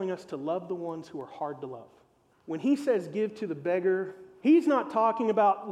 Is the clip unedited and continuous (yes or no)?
no